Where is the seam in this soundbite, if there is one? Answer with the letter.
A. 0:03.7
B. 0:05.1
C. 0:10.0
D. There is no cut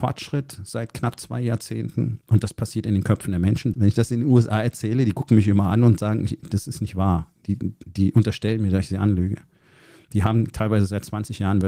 A